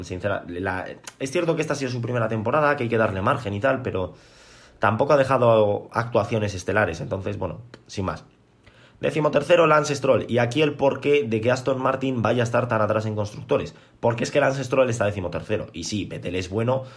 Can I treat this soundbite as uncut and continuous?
yes; 0 cuts

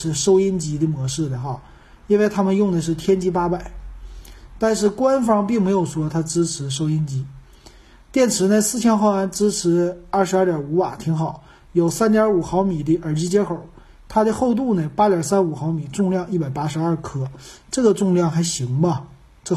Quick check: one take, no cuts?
yes; 0 cuts

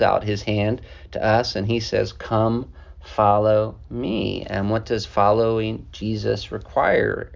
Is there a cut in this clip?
no; 0 cuts

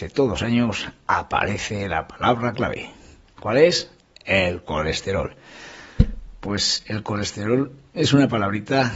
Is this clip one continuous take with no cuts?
yes; 0 cuts

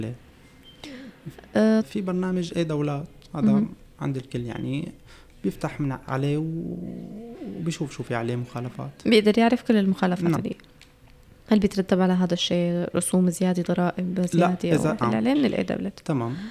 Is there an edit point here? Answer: yes; 3 cuts; at 1.8 s, 10.4 s, 15.0 s

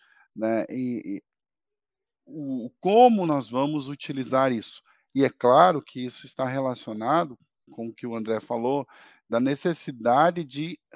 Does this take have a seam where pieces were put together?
yes; 1 cut; at 7.7 s

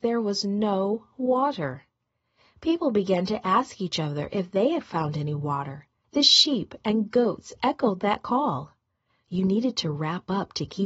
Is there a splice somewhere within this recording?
yes; 2 cuts; at 6.0 s, 9.1 s

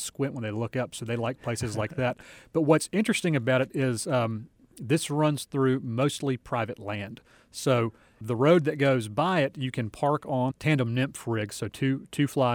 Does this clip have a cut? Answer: yes; 2 cuts; at 8.2 s, 10.5 s

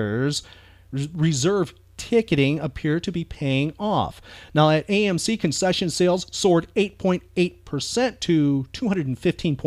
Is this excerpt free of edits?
yes; 0 cuts

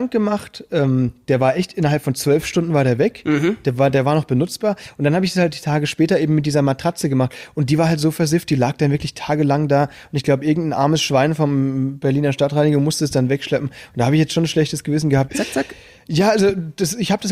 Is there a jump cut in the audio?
yes; 1 cut; at 15.3 s

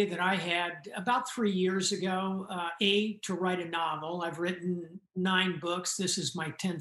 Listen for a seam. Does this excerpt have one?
no; 0 cuts

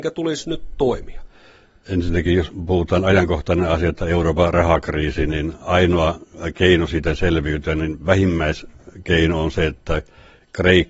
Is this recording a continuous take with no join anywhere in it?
yes; 0 cuts

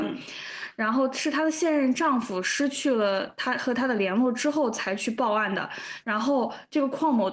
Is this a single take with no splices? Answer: no; 1 cut; at 6.0 s

